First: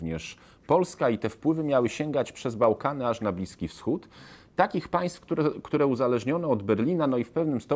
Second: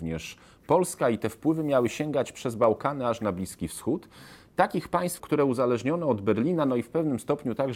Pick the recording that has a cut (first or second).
second